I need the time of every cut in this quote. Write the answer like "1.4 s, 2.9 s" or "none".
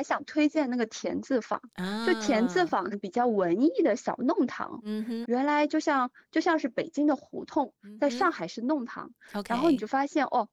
2.9 s, 5.2 s